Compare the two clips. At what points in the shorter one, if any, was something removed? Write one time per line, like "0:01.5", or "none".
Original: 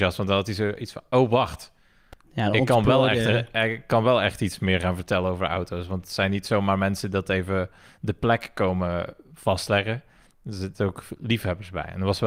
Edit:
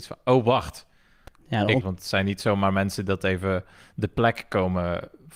0:01.8